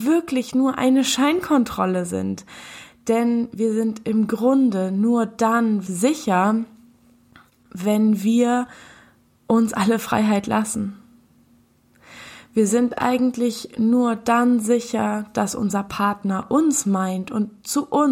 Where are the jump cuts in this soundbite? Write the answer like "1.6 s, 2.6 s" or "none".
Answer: 5.9 s